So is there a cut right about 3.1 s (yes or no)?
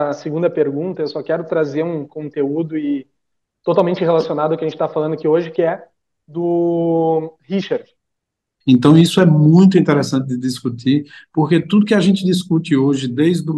no